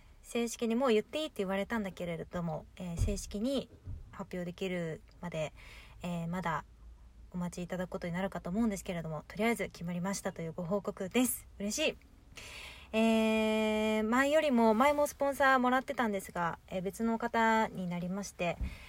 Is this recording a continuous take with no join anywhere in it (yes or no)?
yes